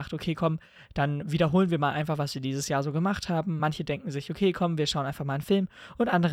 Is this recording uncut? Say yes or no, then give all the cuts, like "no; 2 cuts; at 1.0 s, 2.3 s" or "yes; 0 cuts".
yes; 0 cuts